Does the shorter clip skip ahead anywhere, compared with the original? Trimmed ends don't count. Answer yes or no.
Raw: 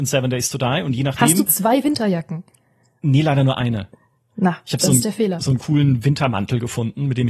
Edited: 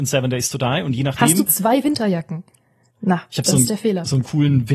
yes